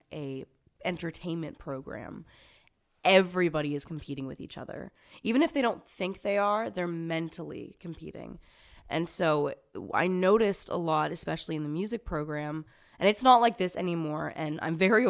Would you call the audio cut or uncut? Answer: uncut